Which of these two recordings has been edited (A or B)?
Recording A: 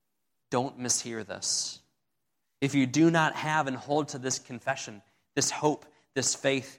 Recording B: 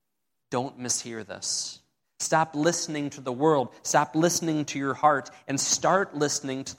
B